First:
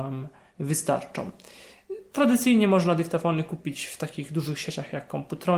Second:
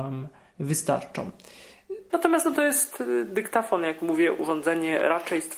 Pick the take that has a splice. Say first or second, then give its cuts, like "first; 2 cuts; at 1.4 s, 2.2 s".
second; 1 cut; at 2.1 s